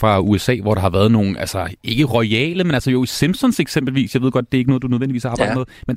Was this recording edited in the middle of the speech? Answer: no; 0 cuts

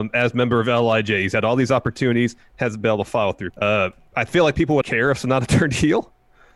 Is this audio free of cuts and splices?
no; 2 cuts; at 3.5 s, 4.8 s

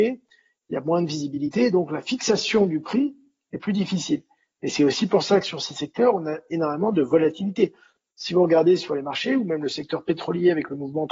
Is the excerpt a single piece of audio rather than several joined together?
yes; 0 cuts

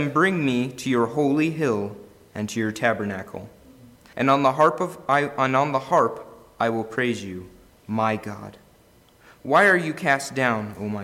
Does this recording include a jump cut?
yes; 2 cuts; at 4.1 s, 7.7 s

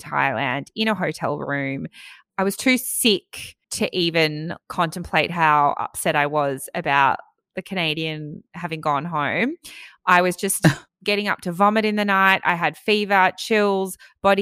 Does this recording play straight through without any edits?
no; 1 cut; at 3.6 s

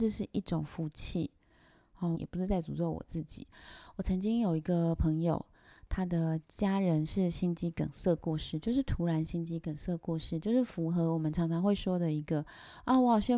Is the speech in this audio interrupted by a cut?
yes; 1 cut; at 2.1 s

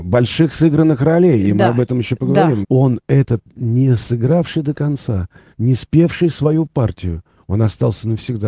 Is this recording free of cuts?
no; 1 cut; at 2.6 s

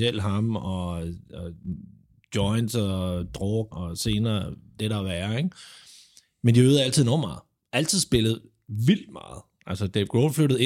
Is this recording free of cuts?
no; 1 cut; at 3.7 s

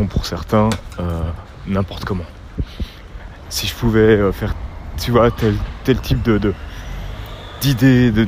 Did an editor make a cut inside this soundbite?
yes; 1 cut; at 3.5 s

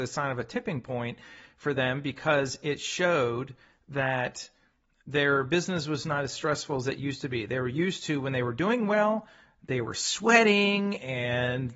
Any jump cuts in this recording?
no; 0 cuts

